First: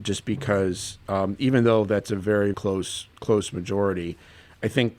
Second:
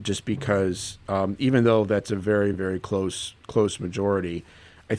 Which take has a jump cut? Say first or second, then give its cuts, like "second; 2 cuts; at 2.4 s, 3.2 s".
first; 1 cut; at 2.5 s